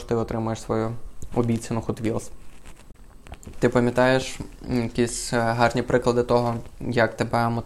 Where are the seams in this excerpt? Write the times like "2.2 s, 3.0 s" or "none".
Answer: 3.5 s